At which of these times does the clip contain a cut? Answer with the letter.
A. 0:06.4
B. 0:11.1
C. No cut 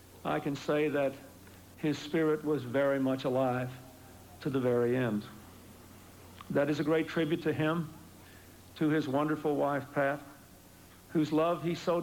B